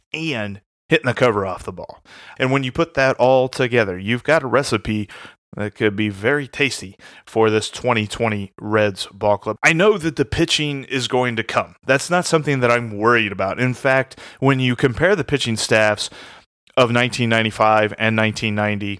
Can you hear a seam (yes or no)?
yes